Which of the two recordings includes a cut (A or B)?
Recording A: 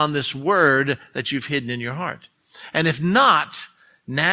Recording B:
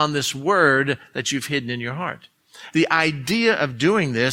B